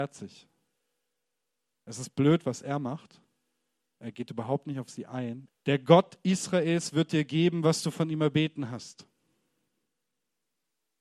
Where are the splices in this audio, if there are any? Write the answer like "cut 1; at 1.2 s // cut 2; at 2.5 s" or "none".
cut 1; at 5.5 s